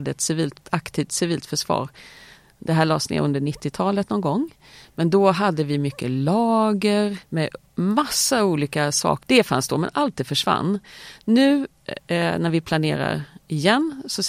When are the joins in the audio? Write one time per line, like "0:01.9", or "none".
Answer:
0:07.2
0:09.2

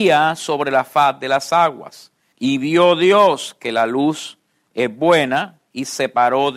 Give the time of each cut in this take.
0:02.3

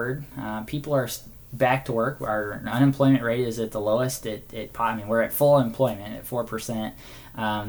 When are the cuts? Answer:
none

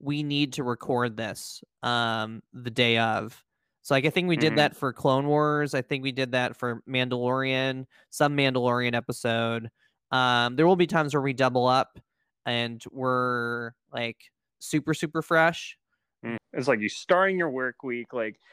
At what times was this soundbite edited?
0:16.4

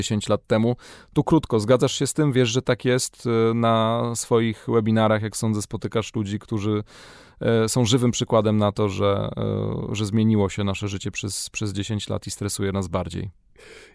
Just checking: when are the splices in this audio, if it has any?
none

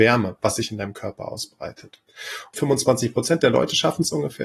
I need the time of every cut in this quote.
0:02.5

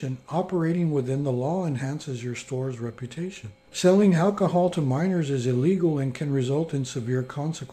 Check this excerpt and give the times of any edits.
0:03.7

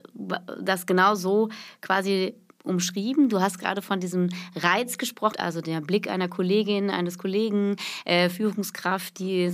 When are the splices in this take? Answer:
0:05.3

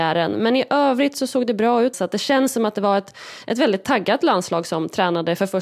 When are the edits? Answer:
0:01.9

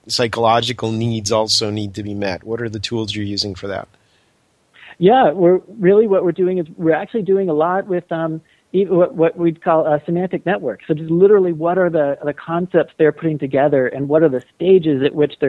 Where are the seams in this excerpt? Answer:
none

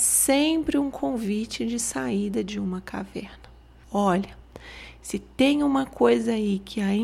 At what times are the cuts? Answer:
0:03.8

